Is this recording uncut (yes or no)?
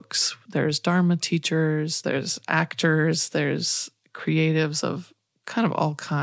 no